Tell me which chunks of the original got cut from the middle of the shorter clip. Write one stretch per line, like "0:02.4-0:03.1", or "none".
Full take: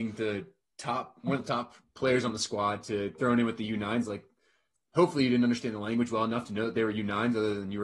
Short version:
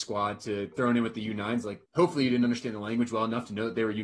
0:04.3-0:04.9